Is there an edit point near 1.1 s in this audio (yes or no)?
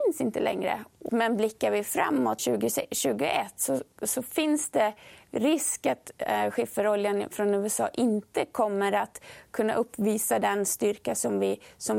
yes